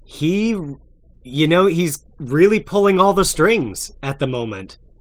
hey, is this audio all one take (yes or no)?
yes